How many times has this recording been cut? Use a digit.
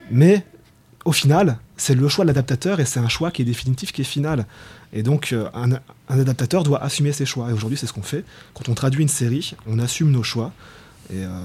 0